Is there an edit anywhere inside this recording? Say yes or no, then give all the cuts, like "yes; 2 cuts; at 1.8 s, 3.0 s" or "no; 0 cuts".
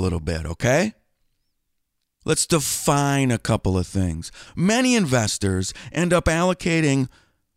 yes; 1 cut; at 4.5 s